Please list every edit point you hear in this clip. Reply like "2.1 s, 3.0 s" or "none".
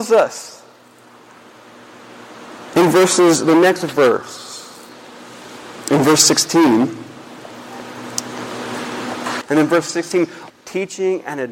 9.4 s, 10.5 s